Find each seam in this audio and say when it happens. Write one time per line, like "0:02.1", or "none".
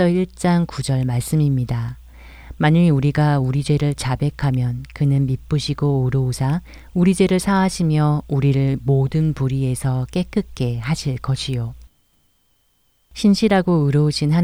none